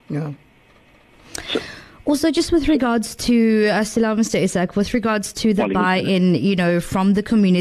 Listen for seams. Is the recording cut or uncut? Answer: uncut